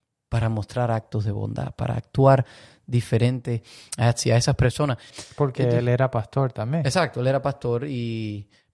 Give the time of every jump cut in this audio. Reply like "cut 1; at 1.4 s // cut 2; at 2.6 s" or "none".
cut 1; at 5.1 s